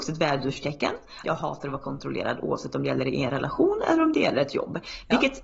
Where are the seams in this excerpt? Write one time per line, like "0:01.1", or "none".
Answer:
0:01.2